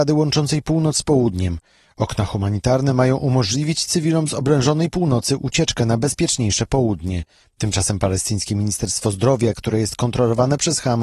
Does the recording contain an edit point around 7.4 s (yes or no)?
yes